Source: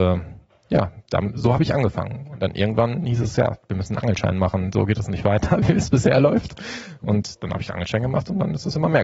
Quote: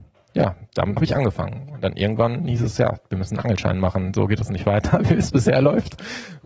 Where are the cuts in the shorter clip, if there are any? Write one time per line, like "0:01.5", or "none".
0:01.0